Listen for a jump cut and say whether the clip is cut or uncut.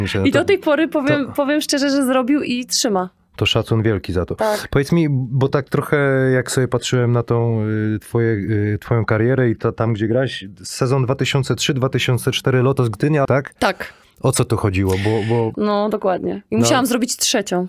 cut